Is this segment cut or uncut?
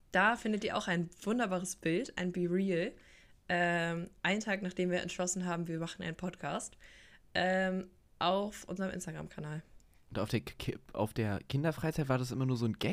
uncut